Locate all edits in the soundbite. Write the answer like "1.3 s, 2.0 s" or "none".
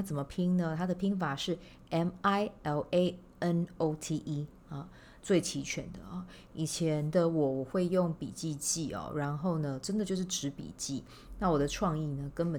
5.2 s

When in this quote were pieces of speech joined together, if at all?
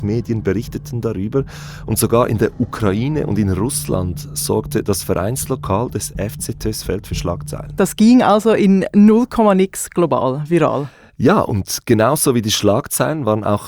7.8 s

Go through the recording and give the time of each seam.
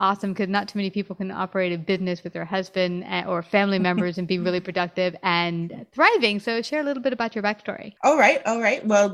8.0 s

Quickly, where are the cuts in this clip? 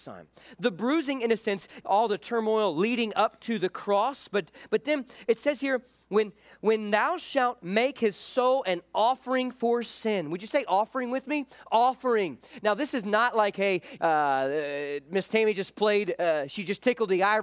1.8 s, 14.0 s

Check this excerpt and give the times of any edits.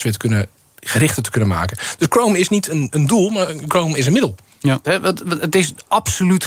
4.8 s

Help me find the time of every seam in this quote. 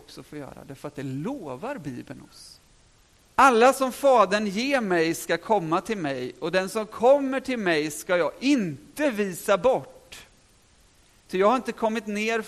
3.2 s

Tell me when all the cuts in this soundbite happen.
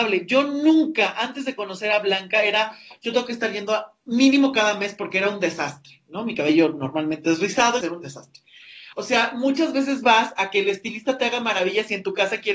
7.8 s, 8.9 s

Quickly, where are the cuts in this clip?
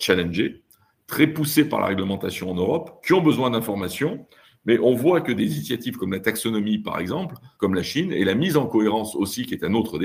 7.6 s

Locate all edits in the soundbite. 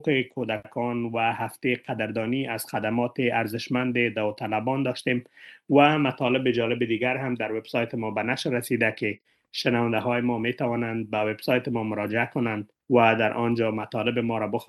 12.8 s

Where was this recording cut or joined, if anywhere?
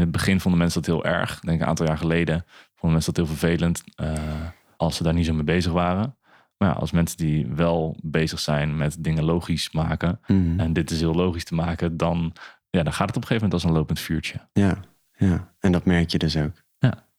4.8 s

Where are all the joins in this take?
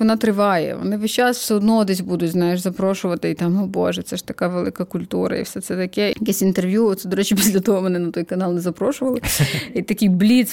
6.1 s

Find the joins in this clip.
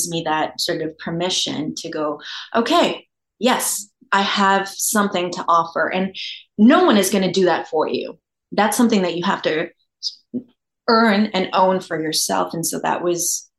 none

